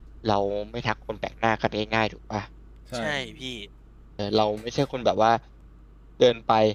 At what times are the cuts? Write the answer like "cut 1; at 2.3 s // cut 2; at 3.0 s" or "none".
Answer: cut 1; at 4.2 s